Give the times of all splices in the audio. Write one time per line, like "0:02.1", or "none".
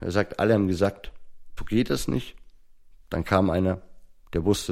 0:01.6